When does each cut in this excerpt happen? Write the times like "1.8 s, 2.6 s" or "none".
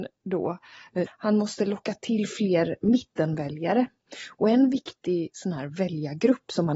1.1 s